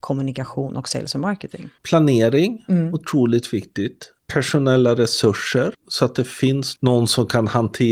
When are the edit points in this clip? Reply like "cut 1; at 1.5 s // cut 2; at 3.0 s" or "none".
none